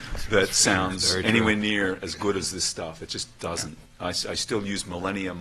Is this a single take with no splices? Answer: yes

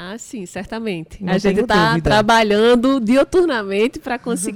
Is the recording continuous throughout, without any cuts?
yes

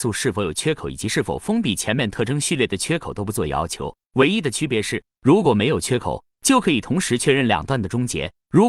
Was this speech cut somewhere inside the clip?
no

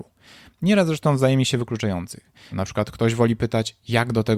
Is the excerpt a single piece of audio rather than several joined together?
no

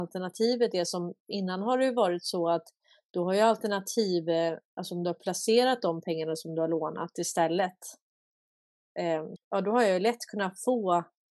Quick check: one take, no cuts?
no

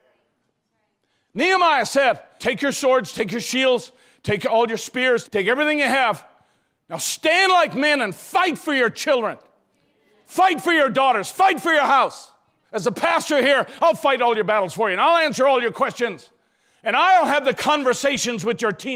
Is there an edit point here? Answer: yes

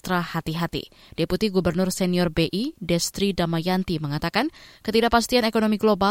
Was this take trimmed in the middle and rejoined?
no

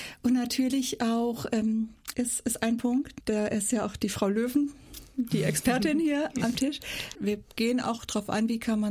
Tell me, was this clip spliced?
yes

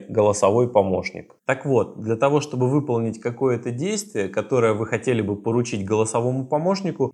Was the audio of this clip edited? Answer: no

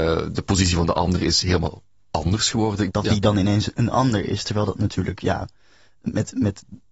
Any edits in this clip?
yes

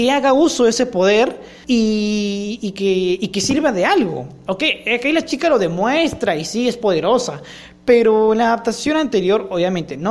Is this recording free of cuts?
no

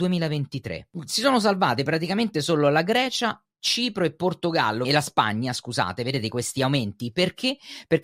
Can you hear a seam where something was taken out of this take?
yes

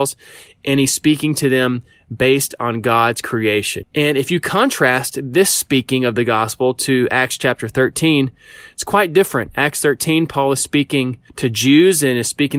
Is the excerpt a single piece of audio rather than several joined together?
no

